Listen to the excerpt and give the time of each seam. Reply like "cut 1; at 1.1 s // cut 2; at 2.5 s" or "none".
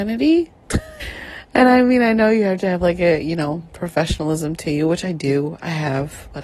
cut 1; at 1.0 s